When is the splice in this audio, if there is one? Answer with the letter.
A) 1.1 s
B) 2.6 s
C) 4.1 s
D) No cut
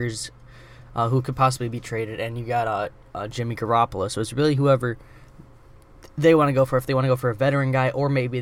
D